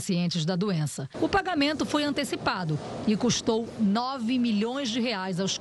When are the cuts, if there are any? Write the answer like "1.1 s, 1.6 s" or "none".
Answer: 1.1 s